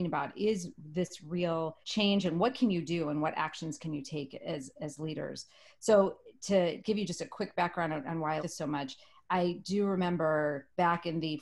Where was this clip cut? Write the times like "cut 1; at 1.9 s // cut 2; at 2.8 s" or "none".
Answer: cut 1; at 1.8 s // cut 2; at 8.4 s